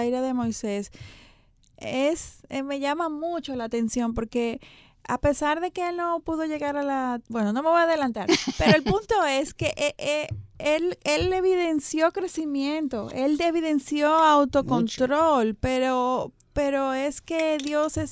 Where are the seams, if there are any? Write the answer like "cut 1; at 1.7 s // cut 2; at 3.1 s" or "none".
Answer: cut 1; at 7.2 s